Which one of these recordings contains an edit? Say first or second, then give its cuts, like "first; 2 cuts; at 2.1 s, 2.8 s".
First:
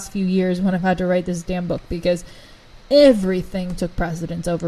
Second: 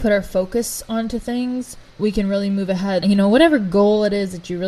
second; 2 cuts; at 1.9 s, 3.0 s